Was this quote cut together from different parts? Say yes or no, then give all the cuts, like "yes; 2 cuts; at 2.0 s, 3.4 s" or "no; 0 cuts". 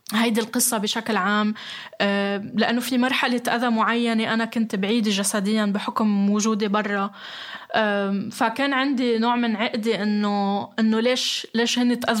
no; 0 cuts